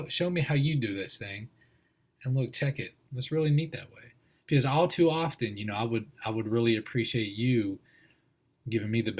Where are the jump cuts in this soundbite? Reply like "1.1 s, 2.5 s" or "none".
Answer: 3.1 s